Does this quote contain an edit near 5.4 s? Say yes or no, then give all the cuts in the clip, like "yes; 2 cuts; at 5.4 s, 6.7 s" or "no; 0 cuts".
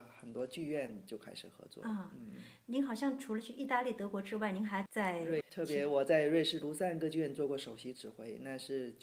yes; 1 cut; at 5.4 s